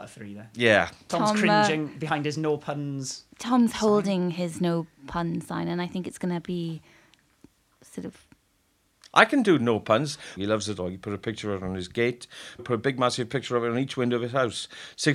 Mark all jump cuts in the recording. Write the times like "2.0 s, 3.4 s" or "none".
10.4 s, 12.6 s